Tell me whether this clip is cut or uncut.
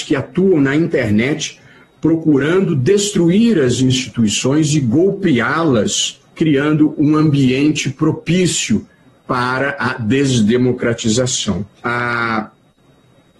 cut